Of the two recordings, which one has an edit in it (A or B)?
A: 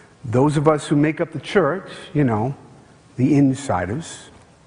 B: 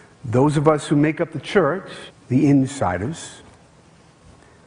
B